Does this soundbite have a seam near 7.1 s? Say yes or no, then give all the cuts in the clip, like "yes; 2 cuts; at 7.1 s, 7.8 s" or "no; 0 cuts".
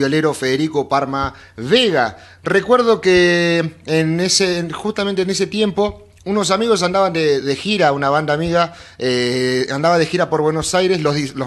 no; 0 cuts